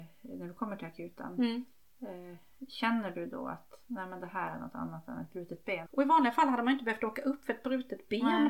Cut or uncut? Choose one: cut